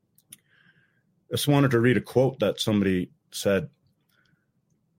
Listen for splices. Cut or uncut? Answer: uncut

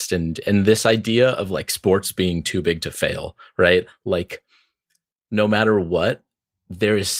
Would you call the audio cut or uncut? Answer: uncut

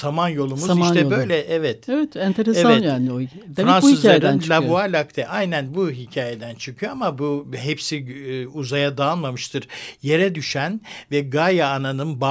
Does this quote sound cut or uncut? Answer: uncut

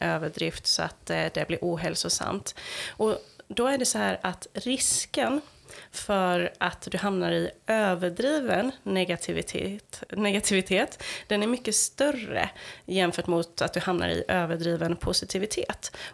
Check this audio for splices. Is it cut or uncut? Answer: uncut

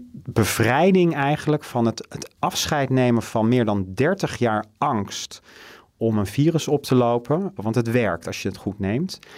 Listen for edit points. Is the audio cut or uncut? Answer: cut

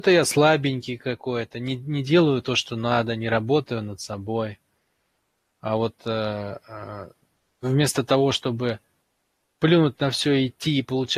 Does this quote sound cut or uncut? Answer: uncut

